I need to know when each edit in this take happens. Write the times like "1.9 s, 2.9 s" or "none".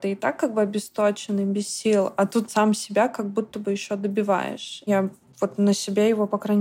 2.5 s, 4.9 s